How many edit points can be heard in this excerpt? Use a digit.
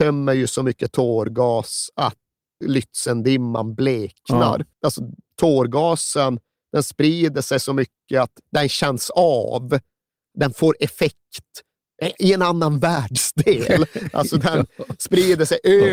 2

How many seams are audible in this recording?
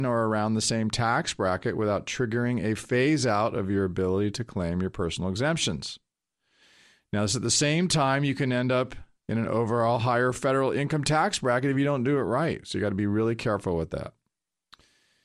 0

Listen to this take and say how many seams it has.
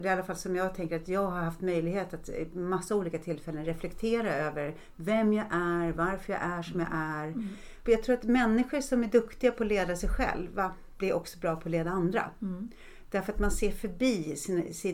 1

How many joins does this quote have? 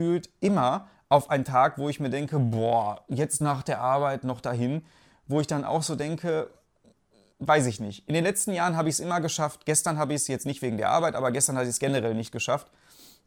0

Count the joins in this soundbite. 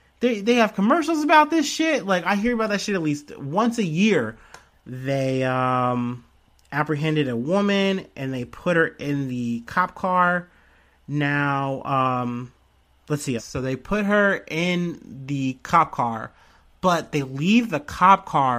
2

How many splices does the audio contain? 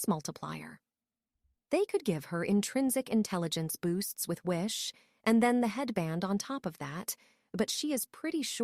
0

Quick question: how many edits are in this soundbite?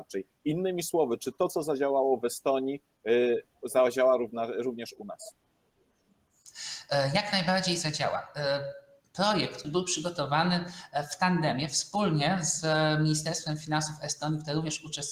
1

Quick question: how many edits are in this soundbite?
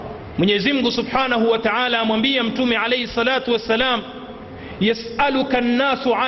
0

